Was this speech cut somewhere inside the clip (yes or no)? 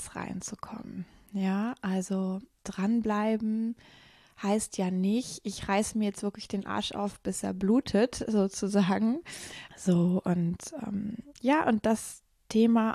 yes